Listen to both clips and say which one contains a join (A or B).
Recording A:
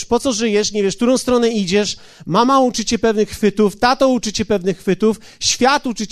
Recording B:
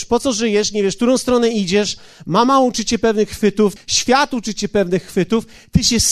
B